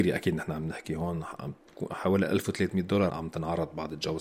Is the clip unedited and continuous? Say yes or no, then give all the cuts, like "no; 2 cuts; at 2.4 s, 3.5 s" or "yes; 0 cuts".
no; 1 cut; at 3.1 s